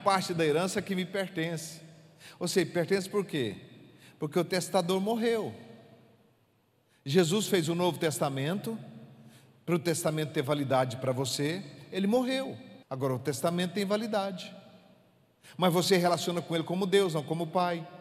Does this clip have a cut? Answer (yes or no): yes